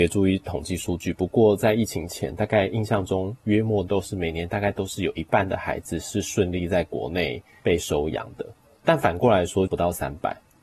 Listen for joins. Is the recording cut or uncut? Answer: cut